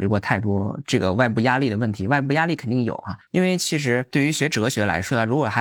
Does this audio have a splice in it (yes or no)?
yes